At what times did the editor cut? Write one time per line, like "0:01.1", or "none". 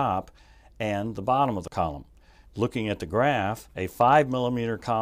0:02.4
0:03.7